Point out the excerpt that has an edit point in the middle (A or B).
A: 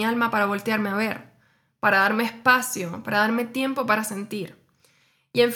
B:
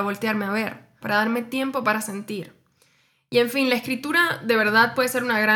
B